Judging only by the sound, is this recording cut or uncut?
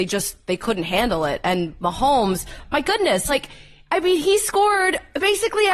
uncut